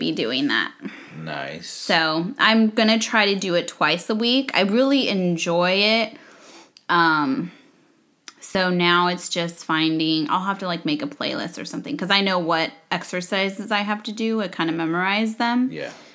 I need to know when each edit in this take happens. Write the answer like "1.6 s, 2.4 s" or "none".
none